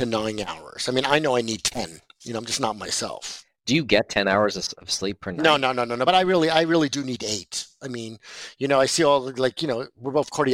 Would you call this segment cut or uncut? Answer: uncut